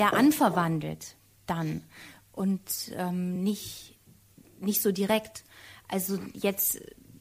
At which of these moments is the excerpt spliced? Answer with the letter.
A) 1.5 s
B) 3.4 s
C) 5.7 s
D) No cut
D